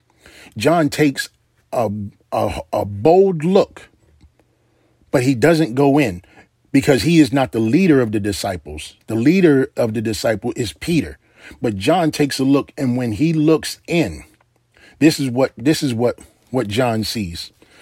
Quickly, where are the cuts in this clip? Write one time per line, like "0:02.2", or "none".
none

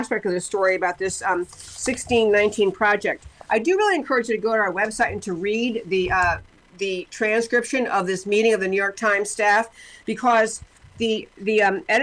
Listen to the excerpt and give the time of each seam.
none

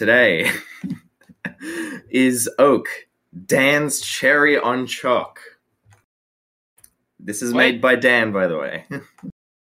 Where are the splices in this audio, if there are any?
none

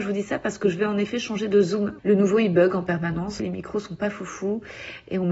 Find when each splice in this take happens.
0:02.0
0:03.4

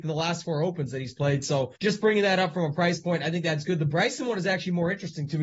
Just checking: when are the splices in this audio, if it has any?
0:01.8

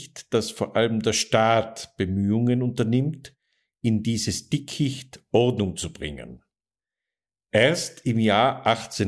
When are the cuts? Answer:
none

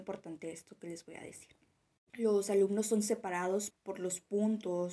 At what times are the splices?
0:02.1
0:03.7

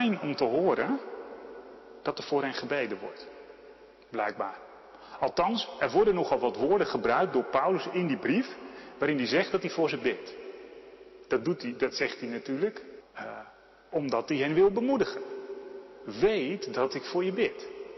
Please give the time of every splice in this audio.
0:13.0

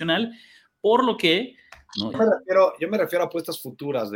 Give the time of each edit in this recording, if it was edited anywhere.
0:02.1

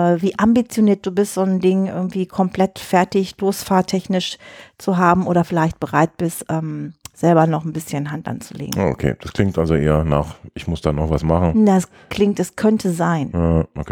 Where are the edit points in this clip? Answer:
none

